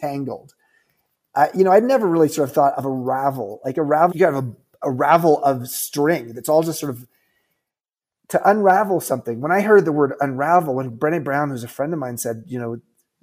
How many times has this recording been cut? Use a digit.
1